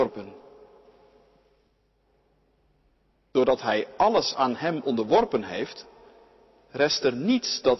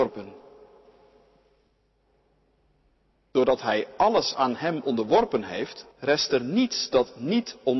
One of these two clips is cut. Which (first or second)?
second